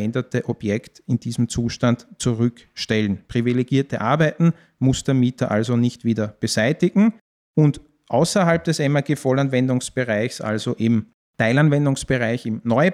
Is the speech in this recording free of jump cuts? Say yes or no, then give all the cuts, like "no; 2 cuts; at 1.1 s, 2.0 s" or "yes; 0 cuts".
yes; 0 cuts